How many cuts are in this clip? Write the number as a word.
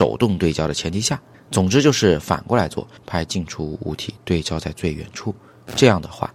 two